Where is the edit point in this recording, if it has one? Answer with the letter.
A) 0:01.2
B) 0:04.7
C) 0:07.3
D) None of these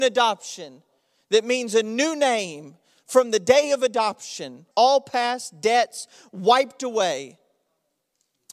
B